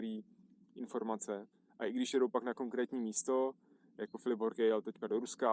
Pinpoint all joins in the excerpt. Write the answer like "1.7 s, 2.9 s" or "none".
none